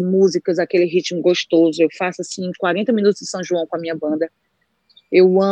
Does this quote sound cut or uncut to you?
uncut